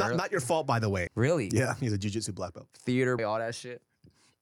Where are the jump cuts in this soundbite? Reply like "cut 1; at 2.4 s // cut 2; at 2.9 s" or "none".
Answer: cut 1; at 1.1 s // cut 2; at 3.2 s